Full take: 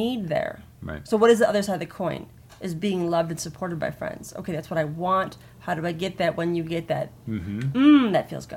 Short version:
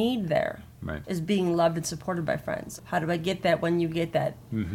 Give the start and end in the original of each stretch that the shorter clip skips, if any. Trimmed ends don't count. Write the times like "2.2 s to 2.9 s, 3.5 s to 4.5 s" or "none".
1.0 s to 2.6 s, 4.3 s to 5.5 s

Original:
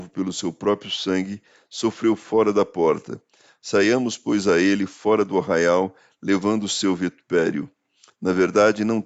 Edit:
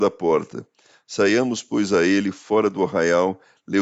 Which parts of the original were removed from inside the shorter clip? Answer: none

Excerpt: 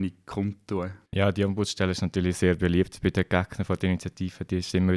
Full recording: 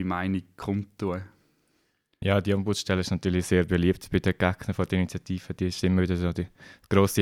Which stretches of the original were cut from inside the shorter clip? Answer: 1.4 s to 2.1 s

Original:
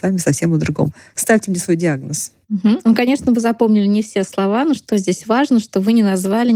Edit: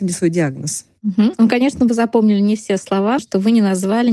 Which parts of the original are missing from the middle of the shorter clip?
4.6 s to 5.6 s

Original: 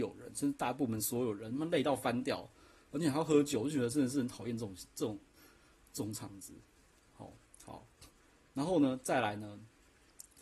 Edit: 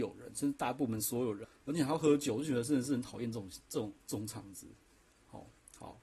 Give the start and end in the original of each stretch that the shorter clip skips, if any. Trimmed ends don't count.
1.4 s to 2.7 s, 5.3 s to 5.9 s

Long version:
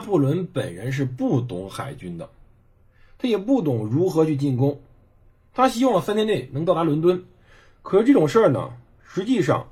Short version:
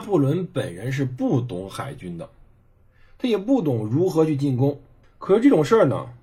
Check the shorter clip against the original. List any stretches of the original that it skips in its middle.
5.0 s to 7.7 s

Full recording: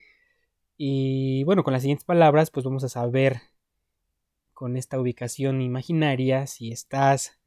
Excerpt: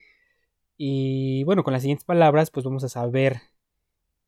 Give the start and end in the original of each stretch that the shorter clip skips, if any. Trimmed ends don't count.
none

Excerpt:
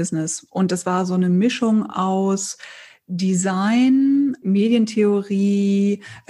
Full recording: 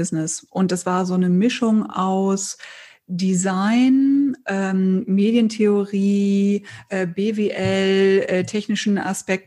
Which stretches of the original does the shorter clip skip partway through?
4.4 s to 5.1 s

